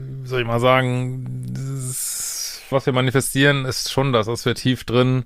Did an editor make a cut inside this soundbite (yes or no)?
yes